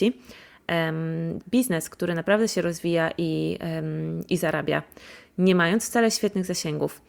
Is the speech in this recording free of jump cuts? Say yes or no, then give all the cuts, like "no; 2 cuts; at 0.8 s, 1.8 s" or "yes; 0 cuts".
no; 1 cut; at 1.4 s